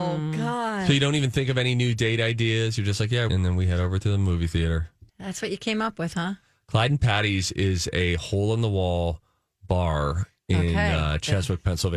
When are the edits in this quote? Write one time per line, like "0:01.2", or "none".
0:03.3
0:05.1